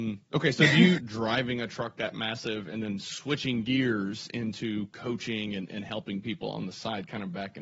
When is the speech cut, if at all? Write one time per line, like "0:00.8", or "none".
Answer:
0:01.0

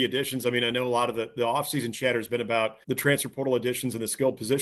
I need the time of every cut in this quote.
0:02.8

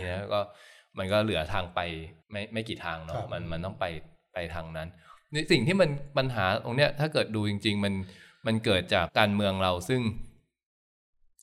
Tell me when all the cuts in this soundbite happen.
0:02.2
0:05.5
0:09.1

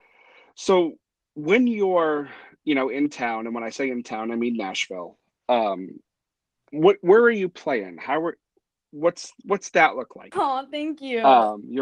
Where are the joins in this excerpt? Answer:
0:10.3

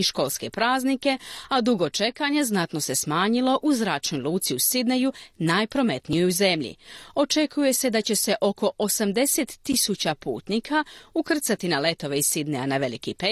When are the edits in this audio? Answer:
none

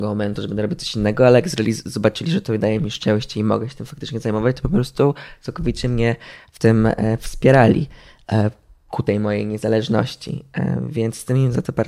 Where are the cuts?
none

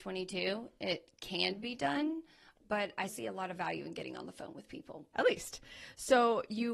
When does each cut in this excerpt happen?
0:03.1
0:05.1

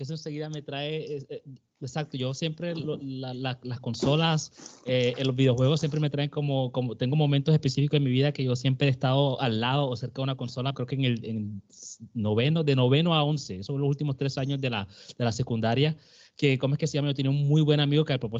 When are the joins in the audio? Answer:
0:10.7

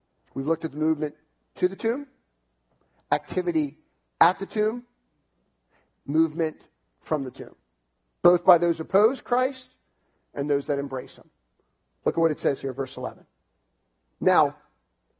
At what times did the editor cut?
none

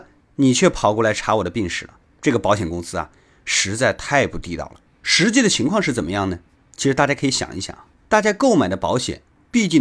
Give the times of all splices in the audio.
none

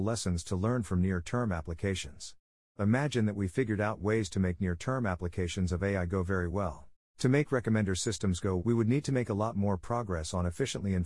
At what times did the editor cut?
0:07.1
0:08.6

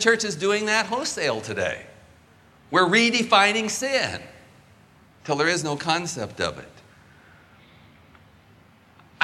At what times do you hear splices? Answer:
none

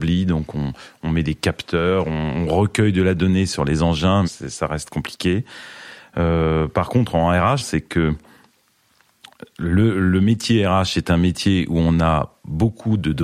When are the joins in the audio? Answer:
0:04.2
0:07.6

